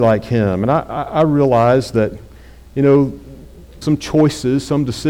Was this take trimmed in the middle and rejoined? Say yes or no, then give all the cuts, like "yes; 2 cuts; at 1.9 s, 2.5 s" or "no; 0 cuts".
yes; 1 cut; at 3.8 s